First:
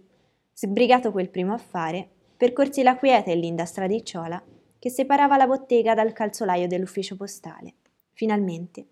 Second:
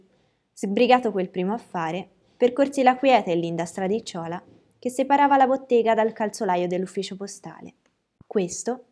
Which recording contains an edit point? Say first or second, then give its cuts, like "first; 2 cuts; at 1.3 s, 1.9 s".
first; 1 cut; at 8.0 s